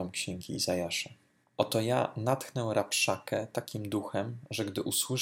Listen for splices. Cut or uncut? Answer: cut